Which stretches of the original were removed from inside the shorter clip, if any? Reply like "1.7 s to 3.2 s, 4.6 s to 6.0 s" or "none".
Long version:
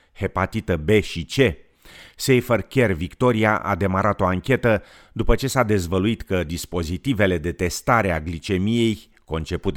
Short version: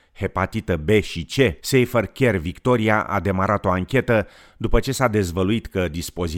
1.6 s to 2.1 s